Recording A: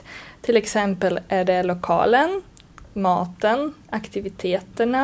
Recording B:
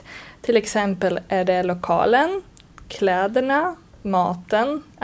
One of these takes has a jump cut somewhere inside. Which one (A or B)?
A